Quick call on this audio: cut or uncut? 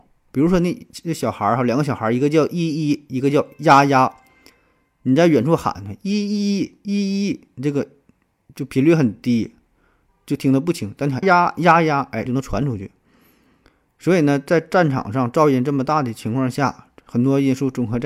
cut